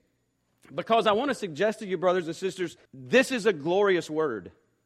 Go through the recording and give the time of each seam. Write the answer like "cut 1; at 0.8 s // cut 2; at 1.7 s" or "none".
cut 1; at 2.9 s